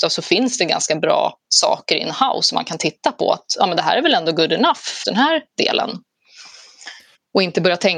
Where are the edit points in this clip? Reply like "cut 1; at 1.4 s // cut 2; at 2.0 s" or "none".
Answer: cut 1; at 5.0 s